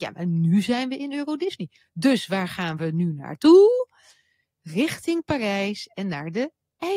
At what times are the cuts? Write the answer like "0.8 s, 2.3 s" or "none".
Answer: none